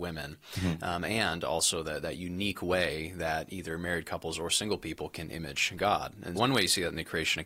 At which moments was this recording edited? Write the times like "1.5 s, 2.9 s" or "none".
6.3 s